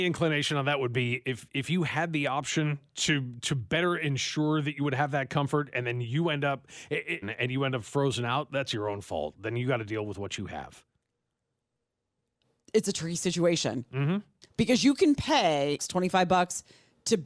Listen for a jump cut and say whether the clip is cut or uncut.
cut